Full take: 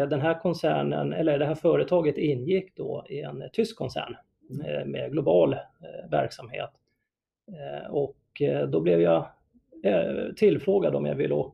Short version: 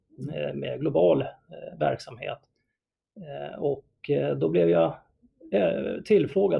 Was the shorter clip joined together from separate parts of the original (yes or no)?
no